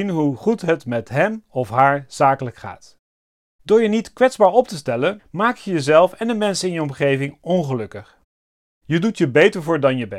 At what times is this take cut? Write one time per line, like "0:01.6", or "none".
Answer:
0:05.2
0:08.7